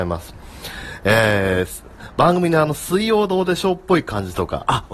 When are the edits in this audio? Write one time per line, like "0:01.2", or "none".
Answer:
none